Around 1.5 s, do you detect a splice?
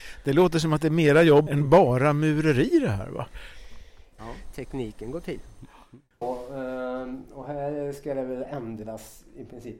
yes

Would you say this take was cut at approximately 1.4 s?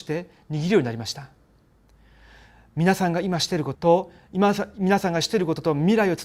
no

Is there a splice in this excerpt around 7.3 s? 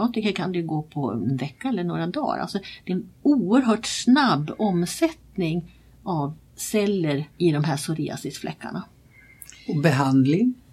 yes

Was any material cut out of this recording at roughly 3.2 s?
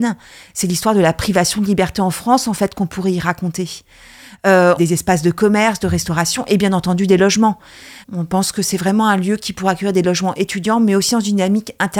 no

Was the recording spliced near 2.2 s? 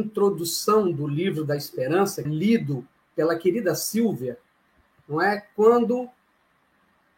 yes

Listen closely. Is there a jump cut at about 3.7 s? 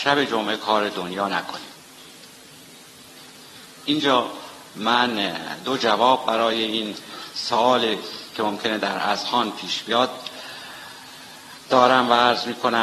yes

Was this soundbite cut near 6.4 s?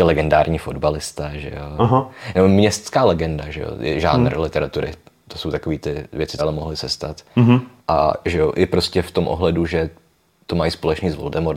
yes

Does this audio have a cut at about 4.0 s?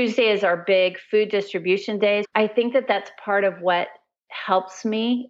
no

